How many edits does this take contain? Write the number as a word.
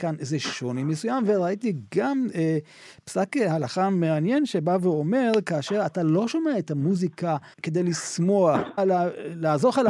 two